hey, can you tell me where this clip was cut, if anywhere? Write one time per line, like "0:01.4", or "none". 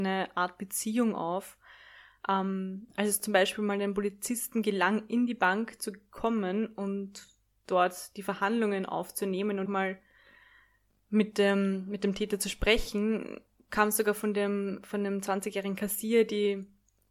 0:09.7